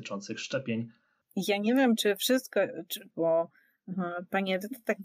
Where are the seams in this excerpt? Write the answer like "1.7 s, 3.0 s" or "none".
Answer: 1.2 s, 3.1 s